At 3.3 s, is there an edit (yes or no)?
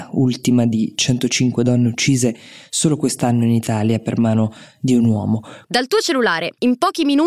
no